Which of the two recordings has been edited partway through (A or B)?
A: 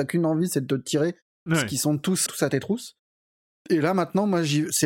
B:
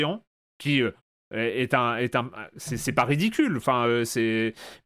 A